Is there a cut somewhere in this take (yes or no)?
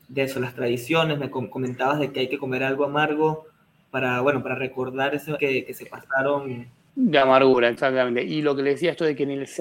yes